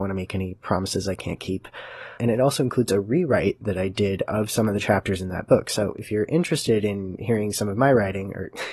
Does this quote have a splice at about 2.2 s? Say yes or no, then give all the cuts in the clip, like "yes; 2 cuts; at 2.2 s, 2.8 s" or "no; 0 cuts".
yes; 1 cut; at 2.2 s